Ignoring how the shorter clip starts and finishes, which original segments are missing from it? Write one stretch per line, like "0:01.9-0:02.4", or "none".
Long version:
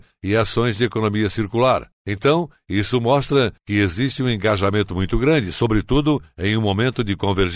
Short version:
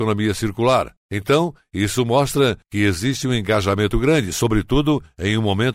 0:04.9-0:05.1